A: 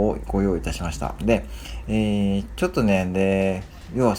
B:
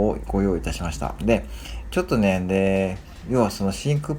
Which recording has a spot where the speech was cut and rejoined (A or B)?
B